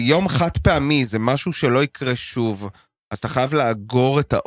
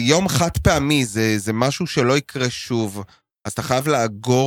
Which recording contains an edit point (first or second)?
first